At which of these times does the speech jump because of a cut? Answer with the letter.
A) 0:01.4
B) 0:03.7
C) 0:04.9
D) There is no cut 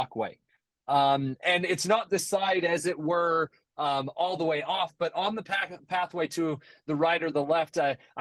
D